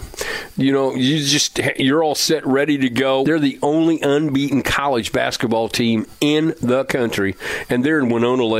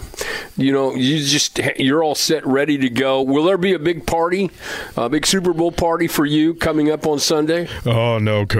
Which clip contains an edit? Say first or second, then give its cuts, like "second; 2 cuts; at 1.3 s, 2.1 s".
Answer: first; 1 cut; at 3.2 s